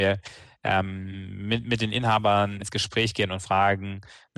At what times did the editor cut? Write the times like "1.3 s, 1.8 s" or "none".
2.6 s